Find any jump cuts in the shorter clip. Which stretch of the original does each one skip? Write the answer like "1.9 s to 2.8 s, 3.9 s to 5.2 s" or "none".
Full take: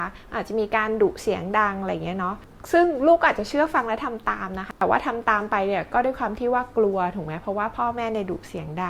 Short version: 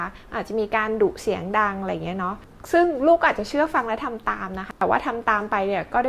none